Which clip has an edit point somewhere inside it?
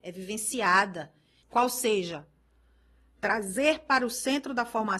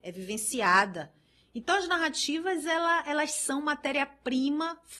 first; 1 cut; at 1.4 s

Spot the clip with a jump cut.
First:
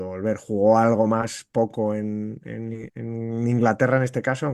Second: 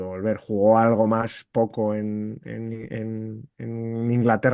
first; 1 cut; at 2.9 s

